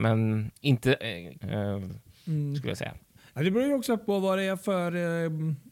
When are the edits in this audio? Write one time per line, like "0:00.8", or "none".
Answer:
0:01.4